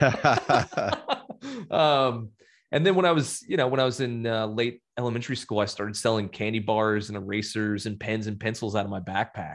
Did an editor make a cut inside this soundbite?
no; 0 cuts

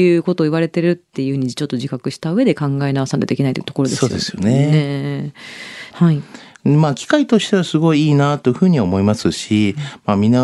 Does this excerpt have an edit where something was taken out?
yes; 1 cut; at 5.9 s

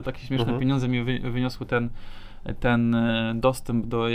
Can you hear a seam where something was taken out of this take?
no; 0 cuts

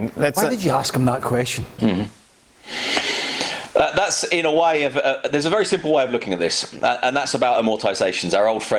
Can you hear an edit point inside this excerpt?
yes; 1 cut; at 1.8 s

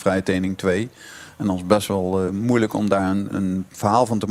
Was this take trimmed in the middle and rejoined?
yes; 2 cuts; at 2.3 s, 3.3 s

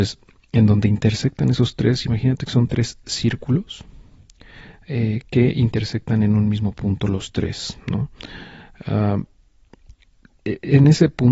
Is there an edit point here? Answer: no; 0 cuts

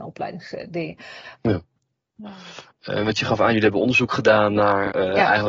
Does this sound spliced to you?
yes; 2 cuts; at 1.4 s, 2.7 s

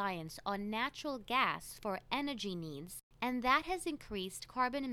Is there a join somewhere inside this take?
no; 0 cuts

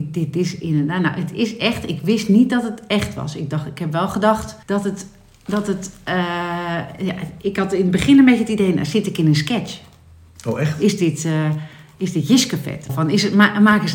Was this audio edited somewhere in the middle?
yes; 2 cuts; at 4.6 s, 12.9 s

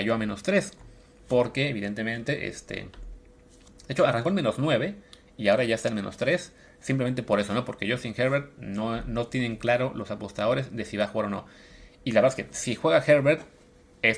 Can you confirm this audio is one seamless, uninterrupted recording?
yes; 0 cuts

